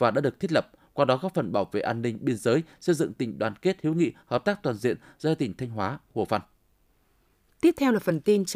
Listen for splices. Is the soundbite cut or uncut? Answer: uncut